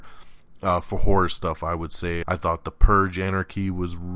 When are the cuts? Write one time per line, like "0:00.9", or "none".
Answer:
0:02.2

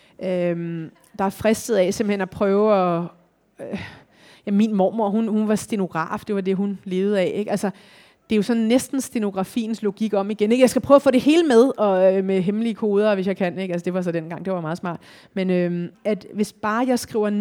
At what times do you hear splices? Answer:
0:15.9

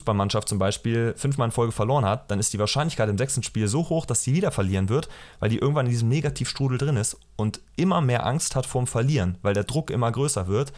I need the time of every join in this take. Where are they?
none

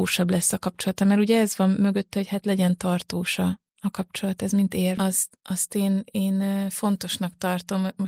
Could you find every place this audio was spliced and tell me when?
0:03.7
0:05.0

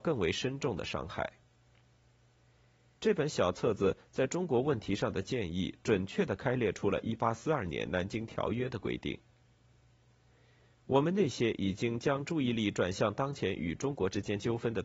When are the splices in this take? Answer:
0:03.0

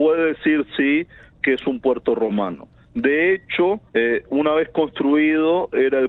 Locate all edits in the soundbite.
0:03.9

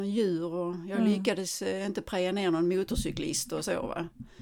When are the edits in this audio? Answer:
none

